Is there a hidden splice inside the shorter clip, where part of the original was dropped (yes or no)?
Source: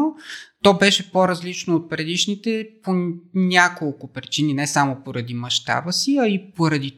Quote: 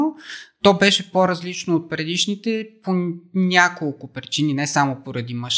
no